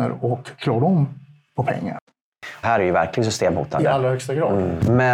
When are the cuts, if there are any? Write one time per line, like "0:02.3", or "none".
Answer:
0:02.6

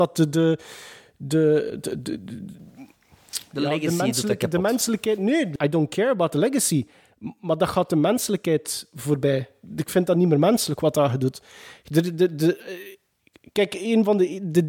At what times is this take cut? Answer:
0:05.6

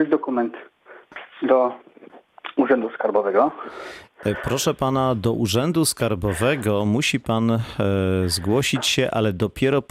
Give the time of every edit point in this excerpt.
none

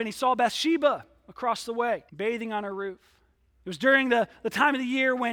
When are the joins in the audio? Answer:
0:02.1
0:03.6

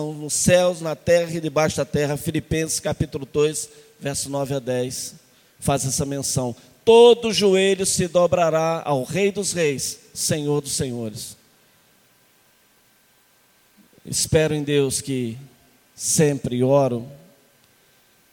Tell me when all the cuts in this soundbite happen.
none

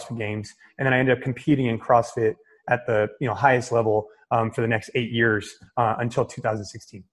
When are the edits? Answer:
none

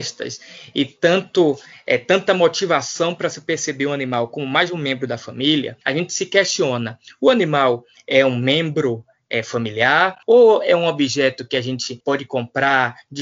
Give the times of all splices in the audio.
0:05.8

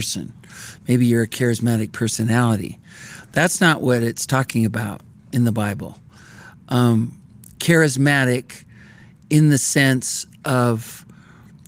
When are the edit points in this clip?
none

